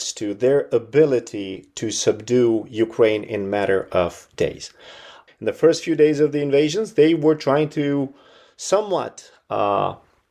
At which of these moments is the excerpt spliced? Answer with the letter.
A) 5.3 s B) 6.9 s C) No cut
A